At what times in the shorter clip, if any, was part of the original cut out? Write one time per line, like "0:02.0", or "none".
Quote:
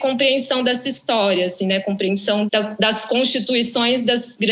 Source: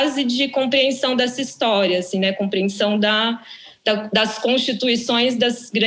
0:02.5